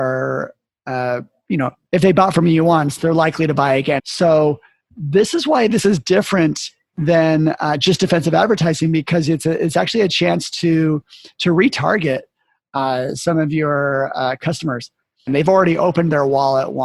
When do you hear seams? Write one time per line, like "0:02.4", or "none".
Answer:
0:04.0
0:15.3